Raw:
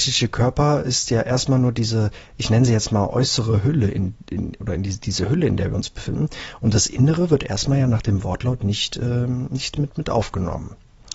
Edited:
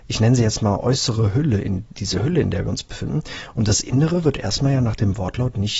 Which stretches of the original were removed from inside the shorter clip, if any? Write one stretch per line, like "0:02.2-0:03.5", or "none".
0:04.2-0:05.0